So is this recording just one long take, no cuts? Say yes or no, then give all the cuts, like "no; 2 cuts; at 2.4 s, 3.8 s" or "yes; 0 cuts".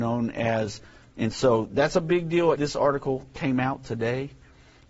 no; 2 cuts; at 1.0 s, 2.5 s